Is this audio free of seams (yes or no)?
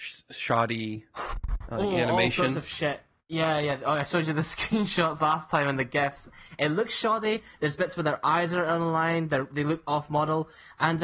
yes